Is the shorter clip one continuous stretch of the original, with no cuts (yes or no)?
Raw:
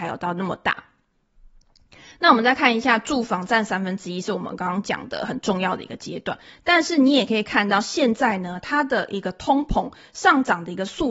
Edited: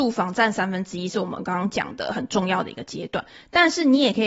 yes